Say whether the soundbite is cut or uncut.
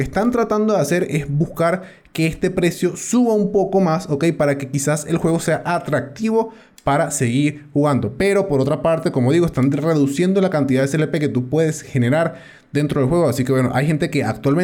uncut